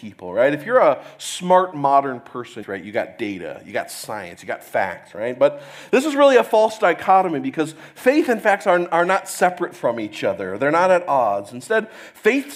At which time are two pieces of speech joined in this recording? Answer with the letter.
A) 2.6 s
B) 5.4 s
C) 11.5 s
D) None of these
A